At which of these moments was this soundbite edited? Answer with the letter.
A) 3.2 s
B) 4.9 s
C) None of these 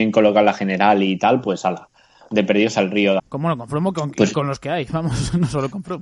A